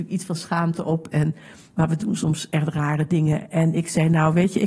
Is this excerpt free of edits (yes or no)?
yes